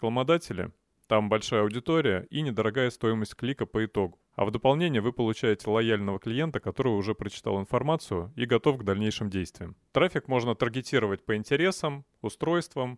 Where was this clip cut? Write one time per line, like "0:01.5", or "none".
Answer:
0:09.8